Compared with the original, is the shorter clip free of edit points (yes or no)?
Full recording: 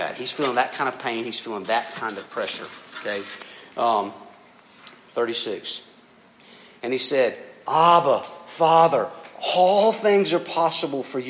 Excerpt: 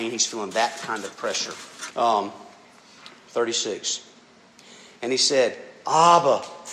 no